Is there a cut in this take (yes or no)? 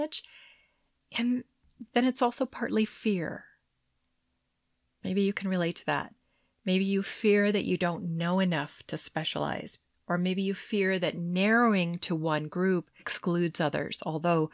yes